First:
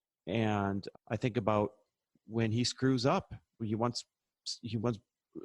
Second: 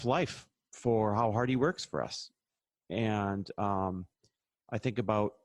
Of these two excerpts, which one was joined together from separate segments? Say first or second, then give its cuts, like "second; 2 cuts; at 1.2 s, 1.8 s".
first; 2 cuts; at 0.9 s, 3.6 s